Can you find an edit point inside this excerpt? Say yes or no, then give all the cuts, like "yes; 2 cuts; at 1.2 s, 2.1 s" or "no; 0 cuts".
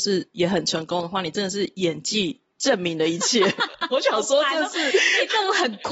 no; 0 cuts